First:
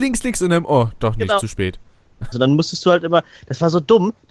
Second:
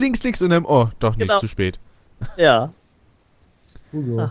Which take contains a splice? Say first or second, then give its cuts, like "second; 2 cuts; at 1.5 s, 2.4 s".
first; 1 cut; at 2.3 s